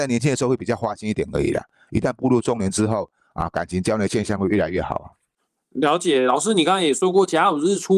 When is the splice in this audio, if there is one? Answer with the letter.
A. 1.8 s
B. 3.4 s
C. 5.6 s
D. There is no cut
D